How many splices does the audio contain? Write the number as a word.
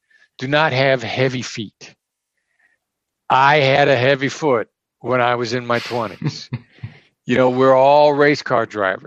zero